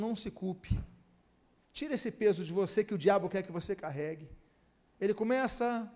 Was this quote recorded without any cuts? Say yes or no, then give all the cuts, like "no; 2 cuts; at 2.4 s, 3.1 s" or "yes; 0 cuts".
no; 1 cut; at 4.9 s